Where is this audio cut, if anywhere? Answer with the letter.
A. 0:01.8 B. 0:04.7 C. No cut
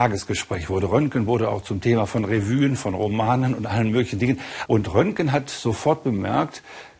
B